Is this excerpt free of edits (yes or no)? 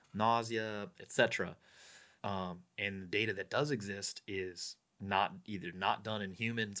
no